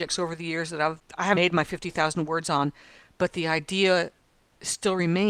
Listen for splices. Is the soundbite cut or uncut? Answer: cut